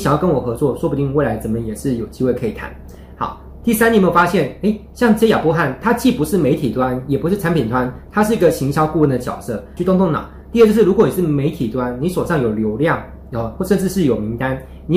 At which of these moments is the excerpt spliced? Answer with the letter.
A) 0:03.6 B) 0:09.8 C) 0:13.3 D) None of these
B